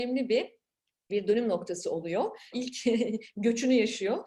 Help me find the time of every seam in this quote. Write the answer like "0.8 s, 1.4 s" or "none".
1.1 s, 2.5 s